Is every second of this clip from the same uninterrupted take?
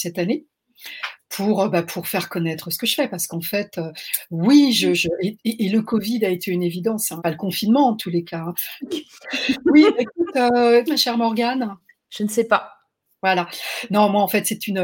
no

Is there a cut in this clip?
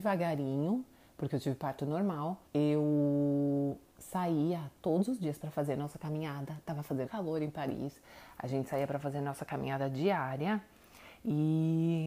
yes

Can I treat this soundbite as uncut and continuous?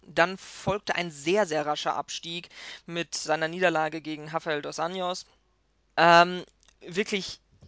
no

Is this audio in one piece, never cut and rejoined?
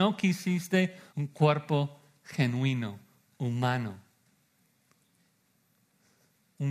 no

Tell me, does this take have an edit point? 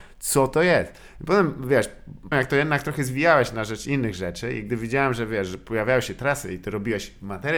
yes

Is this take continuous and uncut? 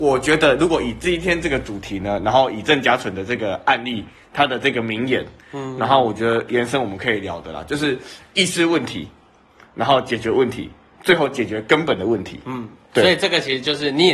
yes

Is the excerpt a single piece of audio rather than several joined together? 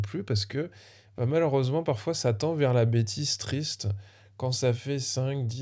yes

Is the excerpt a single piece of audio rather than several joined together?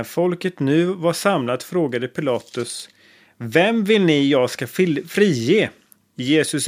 yes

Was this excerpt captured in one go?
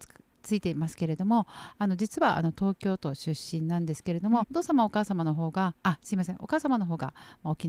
no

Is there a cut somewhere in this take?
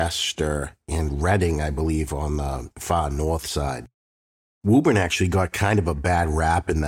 no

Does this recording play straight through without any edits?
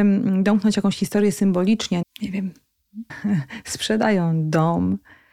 no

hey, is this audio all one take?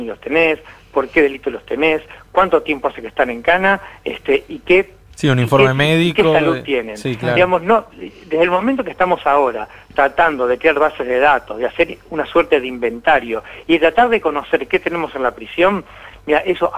yes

